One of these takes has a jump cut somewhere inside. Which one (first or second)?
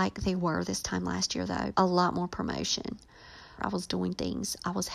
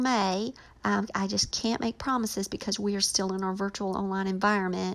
first